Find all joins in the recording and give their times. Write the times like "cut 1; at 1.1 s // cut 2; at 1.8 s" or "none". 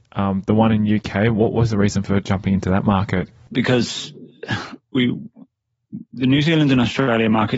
cut 1; at 3.5 s